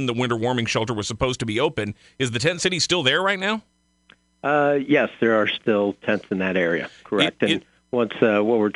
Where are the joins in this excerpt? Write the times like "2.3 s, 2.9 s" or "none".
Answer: none